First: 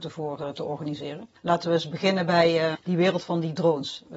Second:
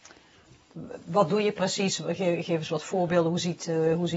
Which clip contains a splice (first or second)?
first